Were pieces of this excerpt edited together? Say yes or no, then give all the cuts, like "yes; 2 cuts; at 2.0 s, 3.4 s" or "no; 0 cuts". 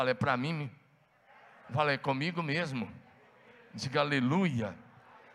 no; 0 cuts